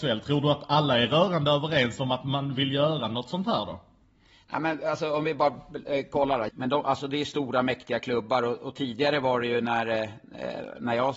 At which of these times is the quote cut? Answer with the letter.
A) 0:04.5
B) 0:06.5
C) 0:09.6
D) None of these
B